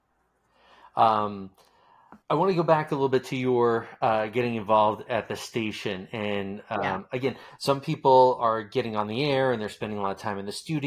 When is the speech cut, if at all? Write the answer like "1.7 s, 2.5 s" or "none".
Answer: 2.2 s